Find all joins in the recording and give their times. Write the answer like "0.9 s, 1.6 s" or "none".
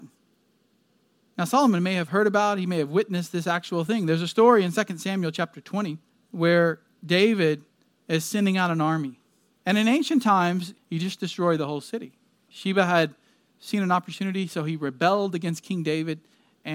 9.6 s, 10.8 s, 12.5 s